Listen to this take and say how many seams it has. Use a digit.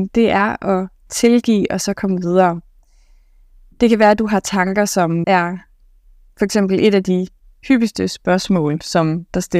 1